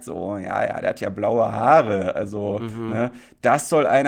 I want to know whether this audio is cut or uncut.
uncut